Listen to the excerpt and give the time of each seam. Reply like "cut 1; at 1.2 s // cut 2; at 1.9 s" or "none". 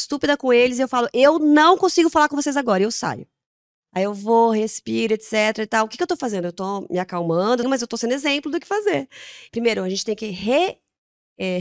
cut 1; at 7.6 s // cut 2; at 9.5 s